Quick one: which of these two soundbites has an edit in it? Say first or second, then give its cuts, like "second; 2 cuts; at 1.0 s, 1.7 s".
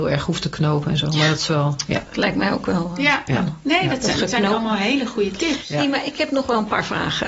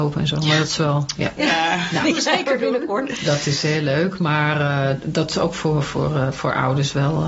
second; 1 cut; at 1.4 s